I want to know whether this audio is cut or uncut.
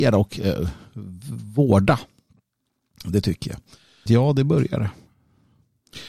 cut